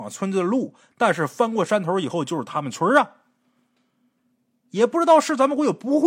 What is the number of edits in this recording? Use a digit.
0